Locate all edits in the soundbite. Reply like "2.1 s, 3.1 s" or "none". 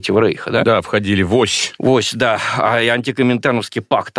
none